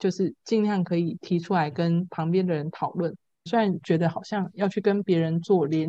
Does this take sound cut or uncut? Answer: cut